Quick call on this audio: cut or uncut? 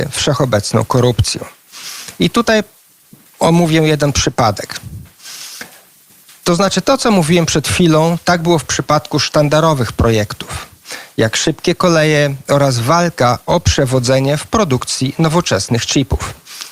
uncut